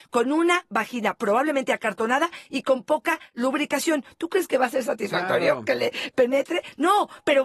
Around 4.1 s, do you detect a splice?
no; 0 cuts

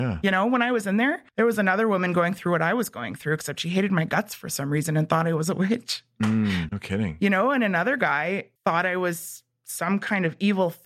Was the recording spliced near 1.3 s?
yes; 3 cuts; at 1.3 s, 6.7 s, 8.6 s

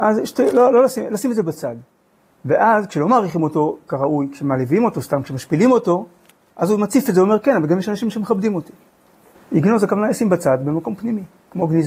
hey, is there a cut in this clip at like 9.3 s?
yes; 1 cut; at 9.3 s

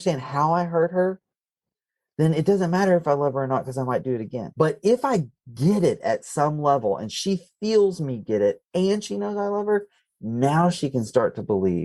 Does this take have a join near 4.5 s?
yes; 1 cut; at 4.5 s

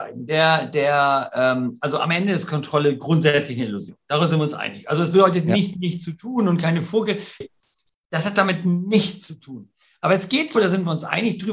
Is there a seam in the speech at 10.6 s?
yes; 2 cuts; at 7.4 s, 10.6 s

